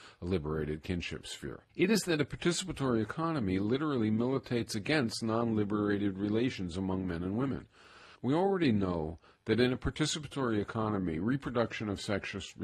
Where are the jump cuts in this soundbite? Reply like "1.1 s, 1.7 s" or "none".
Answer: 1.7 s, 8.1 s